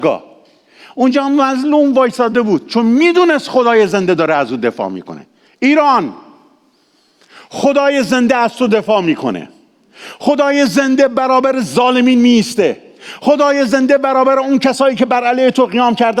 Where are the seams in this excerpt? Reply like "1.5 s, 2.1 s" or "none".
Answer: none